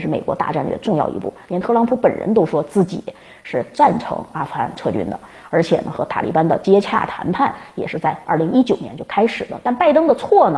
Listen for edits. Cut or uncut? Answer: uncut